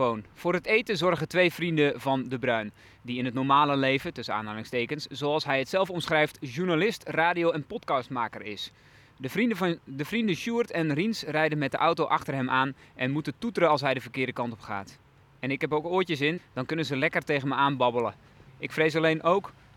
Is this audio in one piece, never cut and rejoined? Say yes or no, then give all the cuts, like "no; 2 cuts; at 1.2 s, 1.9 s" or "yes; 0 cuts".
no; 2 cuts; at 16.4 s, 18.5 s